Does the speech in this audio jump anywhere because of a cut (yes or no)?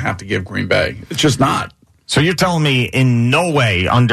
no